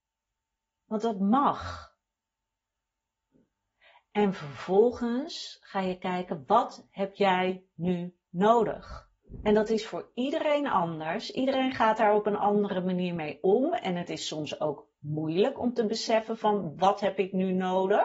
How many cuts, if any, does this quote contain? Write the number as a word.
zero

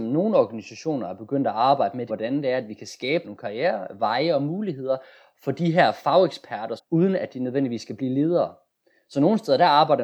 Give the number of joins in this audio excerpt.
three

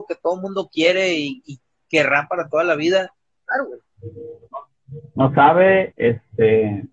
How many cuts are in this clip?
two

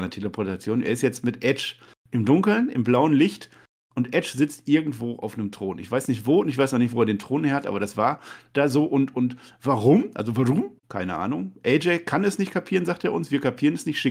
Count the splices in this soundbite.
one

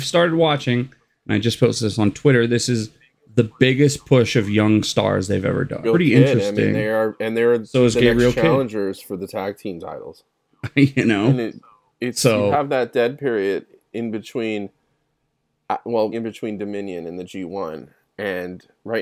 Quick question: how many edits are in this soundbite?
three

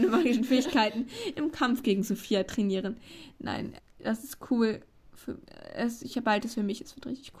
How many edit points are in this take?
one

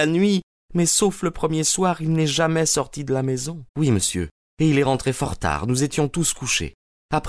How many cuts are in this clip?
one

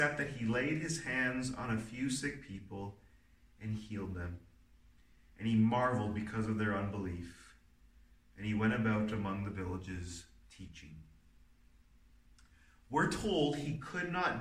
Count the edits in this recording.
zero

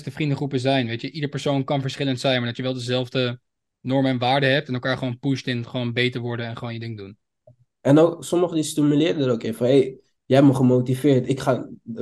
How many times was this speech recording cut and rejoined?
zero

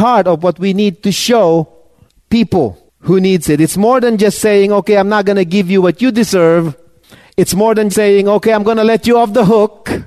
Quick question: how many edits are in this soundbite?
one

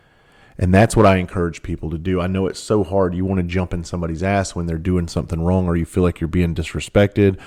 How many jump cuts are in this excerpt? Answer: zero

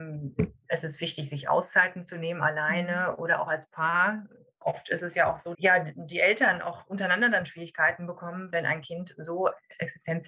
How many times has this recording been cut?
one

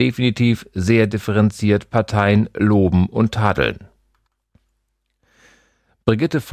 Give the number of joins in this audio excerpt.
zero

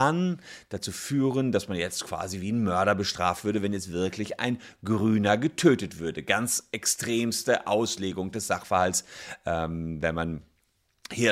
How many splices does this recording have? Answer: zero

